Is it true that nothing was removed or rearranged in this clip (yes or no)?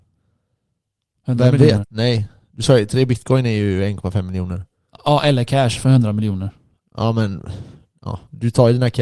no